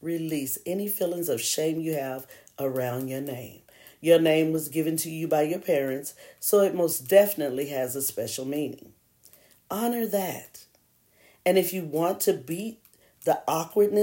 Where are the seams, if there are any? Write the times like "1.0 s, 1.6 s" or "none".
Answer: none

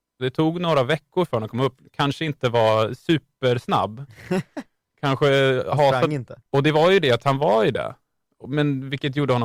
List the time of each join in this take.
6.4 s

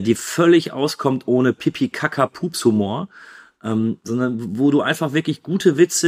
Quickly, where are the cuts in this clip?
none

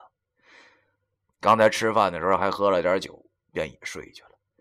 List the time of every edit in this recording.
1.2 s, 3.3 s

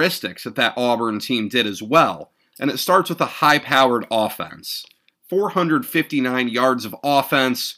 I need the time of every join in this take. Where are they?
5.1 s

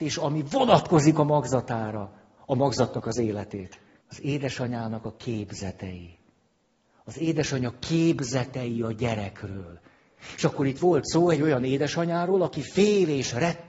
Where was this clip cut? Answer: 4.0 s

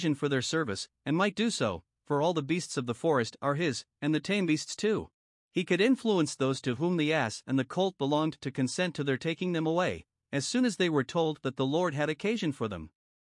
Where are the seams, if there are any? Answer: 5.4 s

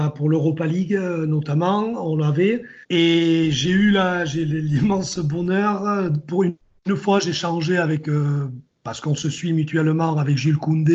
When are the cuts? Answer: 2.8 s

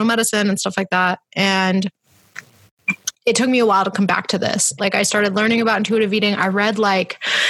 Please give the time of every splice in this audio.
4.8 s

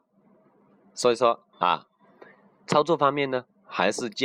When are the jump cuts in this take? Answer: 1.5 s

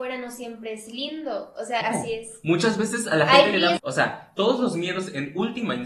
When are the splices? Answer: 1.8 s, 3.8 s

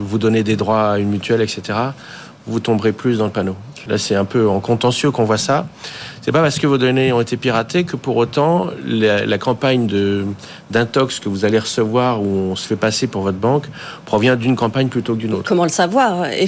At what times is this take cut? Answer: 3.9 s

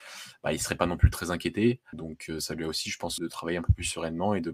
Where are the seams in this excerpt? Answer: 1.9 s, 3.2 s

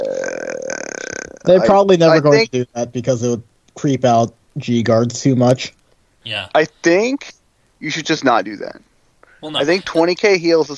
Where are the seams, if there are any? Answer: none

